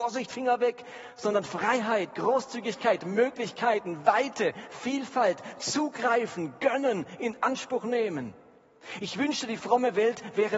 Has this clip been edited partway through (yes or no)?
no